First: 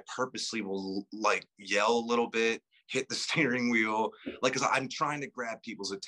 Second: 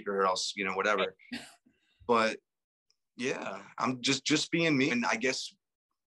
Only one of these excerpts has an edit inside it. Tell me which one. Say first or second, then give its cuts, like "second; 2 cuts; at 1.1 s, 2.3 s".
second; 1 cut; at 4.9 s